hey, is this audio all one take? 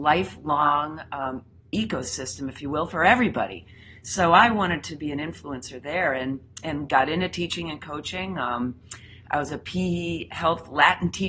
yes; 0 cuts

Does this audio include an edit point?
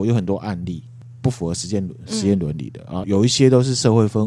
yes; 1 cut; at 3.0 s

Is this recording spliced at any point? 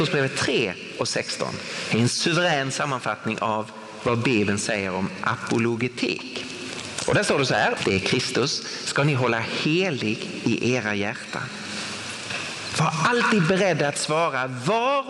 yes; 1 cut; at 7.8 s

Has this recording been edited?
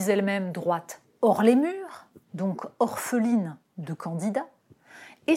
no; 0 cuts

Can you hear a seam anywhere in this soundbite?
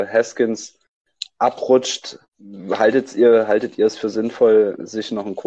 yes; 1 cut; at 2.3 s

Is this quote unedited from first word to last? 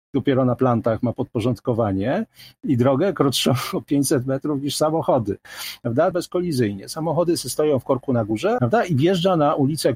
no; 2 cuts; at 6.1 s, 8.6 s

